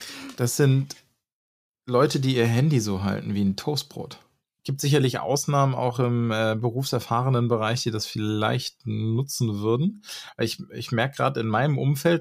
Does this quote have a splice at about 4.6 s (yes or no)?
yes